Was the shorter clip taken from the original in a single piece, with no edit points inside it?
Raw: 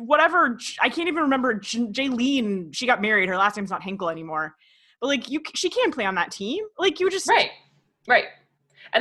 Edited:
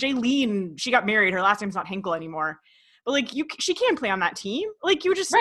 yes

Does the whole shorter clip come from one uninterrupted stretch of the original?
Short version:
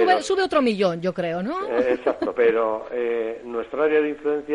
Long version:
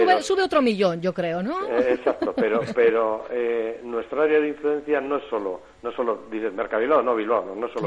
no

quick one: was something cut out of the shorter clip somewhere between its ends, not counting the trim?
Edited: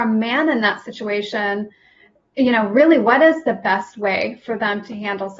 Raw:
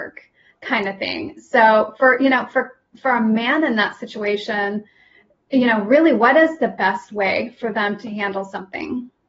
no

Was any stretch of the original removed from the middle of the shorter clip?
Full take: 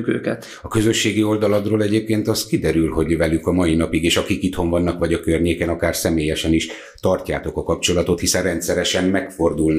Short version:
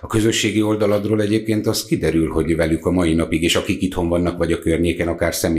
no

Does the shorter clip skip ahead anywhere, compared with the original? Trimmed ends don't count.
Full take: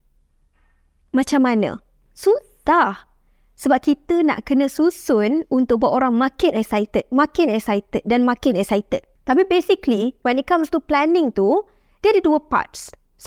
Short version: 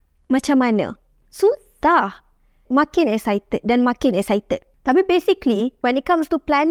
yes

